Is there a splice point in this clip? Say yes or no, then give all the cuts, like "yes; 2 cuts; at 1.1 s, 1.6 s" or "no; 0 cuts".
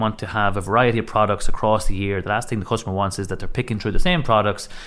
no; 0 cuts